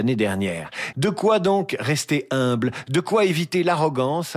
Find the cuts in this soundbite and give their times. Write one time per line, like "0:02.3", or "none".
0:00.9